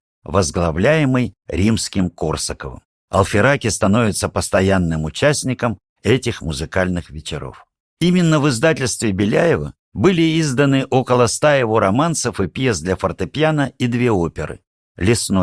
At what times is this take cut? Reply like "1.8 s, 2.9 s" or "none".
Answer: none